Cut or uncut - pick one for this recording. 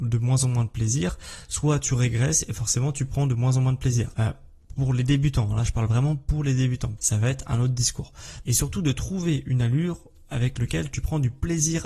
cut